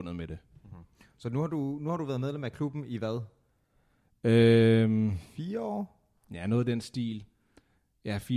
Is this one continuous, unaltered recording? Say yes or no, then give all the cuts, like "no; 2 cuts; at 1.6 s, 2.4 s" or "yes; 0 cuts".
yes; 0 cuts